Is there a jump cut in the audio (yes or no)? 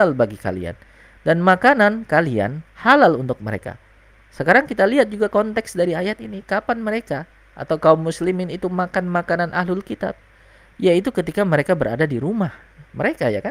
no